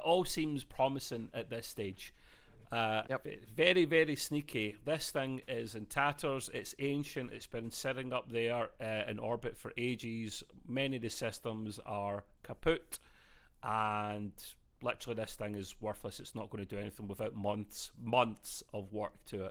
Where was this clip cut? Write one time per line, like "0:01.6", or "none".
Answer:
0:03.0